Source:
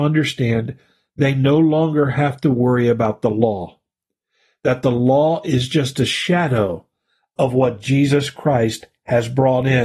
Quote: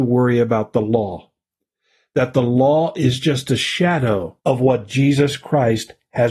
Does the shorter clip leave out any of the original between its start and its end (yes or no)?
yes